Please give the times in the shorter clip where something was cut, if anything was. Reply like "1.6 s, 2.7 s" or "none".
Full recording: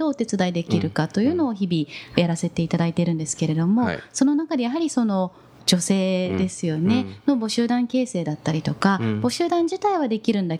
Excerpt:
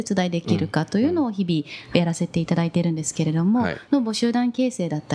3.9 s